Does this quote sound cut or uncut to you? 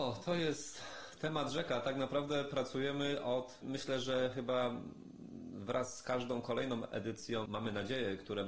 cut